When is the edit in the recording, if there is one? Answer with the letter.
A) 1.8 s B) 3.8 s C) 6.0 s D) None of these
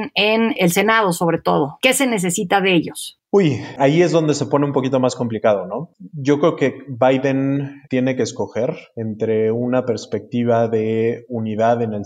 D